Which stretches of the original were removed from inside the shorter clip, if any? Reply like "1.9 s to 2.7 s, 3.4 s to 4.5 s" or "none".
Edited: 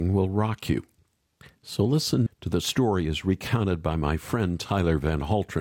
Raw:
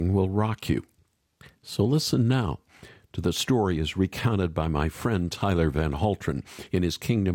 2.3 s to 3.0 s

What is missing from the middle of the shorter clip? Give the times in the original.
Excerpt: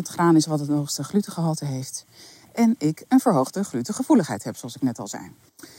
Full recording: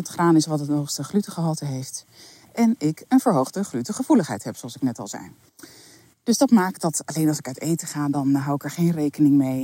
none

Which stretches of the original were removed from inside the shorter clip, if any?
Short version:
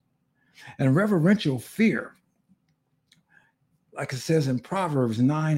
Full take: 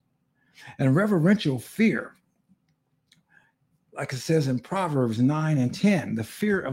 none

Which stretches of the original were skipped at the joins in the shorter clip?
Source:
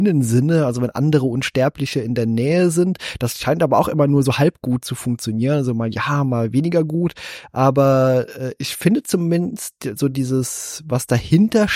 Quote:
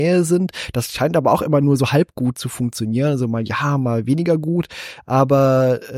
none

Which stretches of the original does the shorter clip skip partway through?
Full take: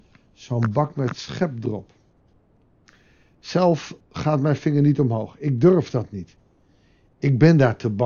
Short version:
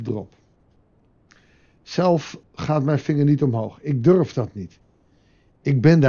none

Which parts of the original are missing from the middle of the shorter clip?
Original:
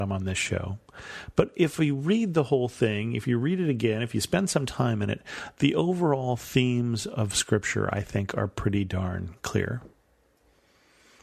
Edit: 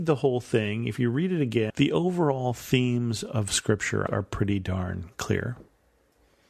4.0 s to 5.5 s, 7.9 s to 8.3 s

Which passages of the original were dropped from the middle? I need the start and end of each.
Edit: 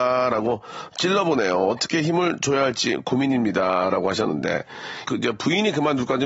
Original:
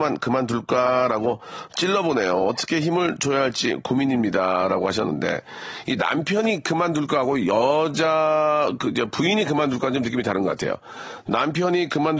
5.8 s to 8.8 s

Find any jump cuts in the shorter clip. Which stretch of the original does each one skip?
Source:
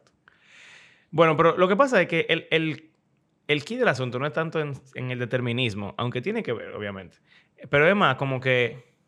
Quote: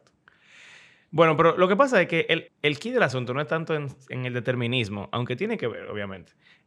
2.5 s to 3.3 s

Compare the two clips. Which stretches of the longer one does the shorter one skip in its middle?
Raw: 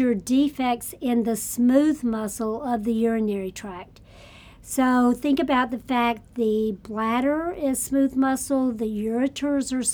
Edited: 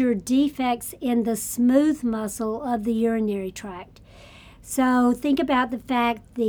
none

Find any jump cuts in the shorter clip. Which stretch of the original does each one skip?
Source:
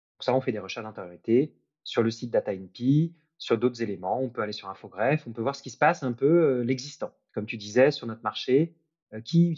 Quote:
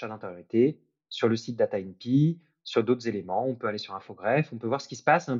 none

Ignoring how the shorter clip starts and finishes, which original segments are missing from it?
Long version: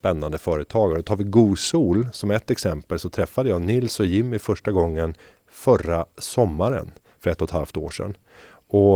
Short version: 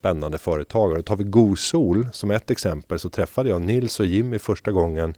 none

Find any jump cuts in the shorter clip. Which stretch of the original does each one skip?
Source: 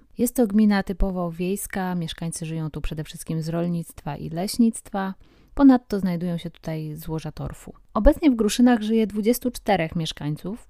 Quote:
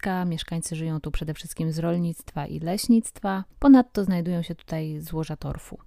5.2 s to 5.5 s

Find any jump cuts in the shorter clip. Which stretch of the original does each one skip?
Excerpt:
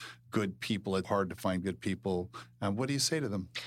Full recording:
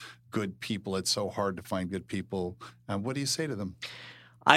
1.0 s to 1.3 s

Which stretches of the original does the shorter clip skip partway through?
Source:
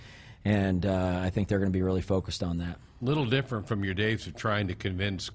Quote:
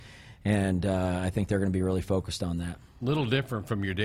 none

